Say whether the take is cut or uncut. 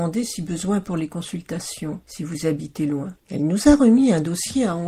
cut